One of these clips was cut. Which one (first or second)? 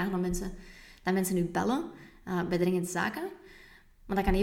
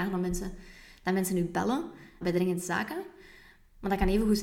second